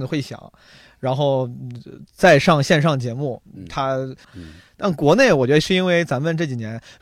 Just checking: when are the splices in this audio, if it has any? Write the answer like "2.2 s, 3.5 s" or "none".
4.2 s